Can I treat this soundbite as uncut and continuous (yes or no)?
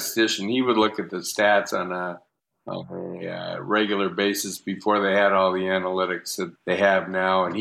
no